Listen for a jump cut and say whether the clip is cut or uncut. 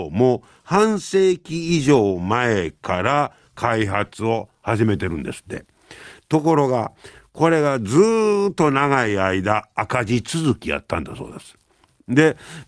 uncut